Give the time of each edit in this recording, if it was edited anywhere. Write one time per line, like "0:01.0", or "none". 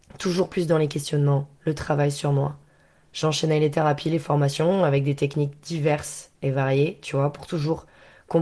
none